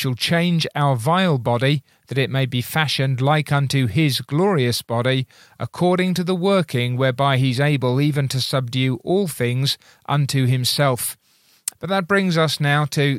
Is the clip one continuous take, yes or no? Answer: no